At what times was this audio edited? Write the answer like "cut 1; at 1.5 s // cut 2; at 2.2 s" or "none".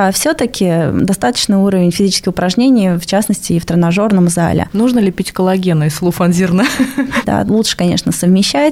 cut 1; at 4.7 s // cut 2; at 7.2 s